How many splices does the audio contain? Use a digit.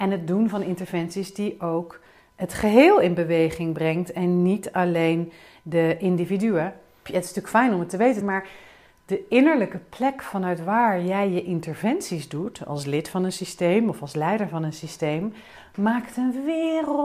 2